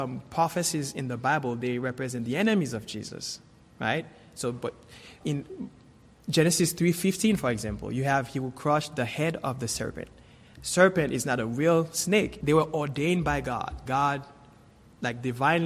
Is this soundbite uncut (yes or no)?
no